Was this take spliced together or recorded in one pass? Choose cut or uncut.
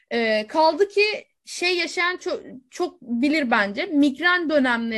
uncut